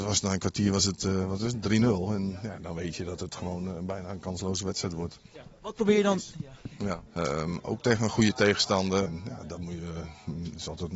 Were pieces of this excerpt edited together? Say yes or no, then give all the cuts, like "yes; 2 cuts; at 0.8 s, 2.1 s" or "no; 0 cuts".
yes; 2 cuts; at 7.1 s, 9.1 s